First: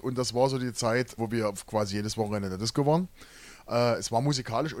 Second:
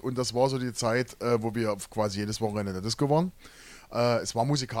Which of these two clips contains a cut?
first; 1 cut; at 1.2 s

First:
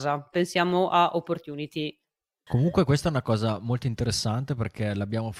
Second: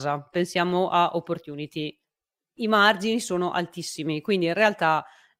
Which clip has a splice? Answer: first; 1 cut; at 2.5 s

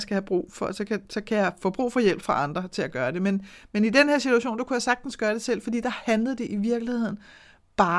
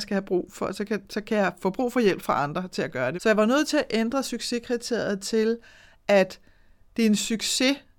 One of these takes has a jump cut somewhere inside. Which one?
second; 1 cut; at 3.2 s

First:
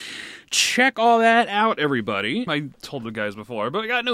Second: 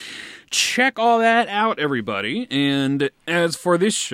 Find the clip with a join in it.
first; 1 cut; at 2.5 s

